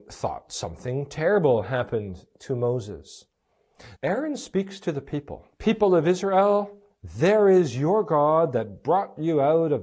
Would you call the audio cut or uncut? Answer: cut